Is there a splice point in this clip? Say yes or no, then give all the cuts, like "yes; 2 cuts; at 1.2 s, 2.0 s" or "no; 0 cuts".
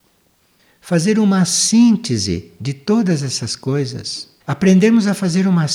yes; 1 cut; at 4.4 s